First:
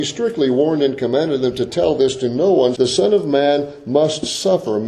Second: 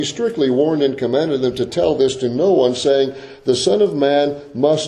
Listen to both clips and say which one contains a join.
first; 1 cut; at 2.7 s

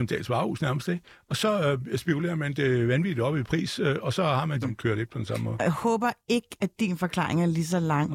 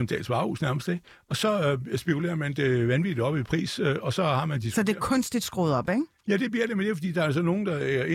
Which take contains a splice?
first; 1 cut; at 4.6 s

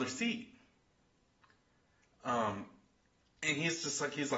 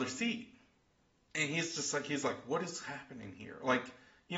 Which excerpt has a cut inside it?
second; 1 cut; at 1.3 s

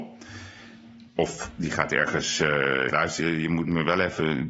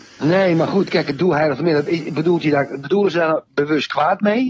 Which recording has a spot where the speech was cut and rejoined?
first; 1 cut; at 2.9 s

